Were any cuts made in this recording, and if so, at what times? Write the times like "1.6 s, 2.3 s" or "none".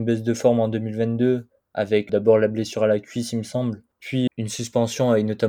2.1 s, 4.3 s